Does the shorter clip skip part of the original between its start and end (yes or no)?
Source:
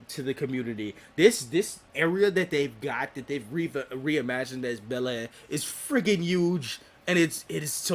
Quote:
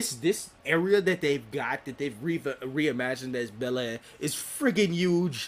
no